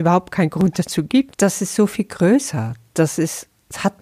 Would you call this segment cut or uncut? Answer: cut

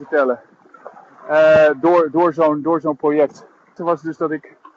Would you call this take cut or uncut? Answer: cut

